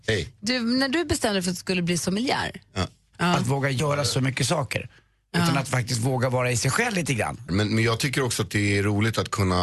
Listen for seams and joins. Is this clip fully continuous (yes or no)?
no